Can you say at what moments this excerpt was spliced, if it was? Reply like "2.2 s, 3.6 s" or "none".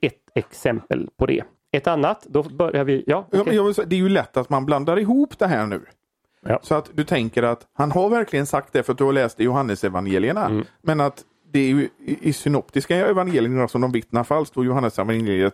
none